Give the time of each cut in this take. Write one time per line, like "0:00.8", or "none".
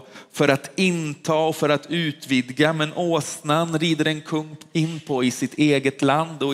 none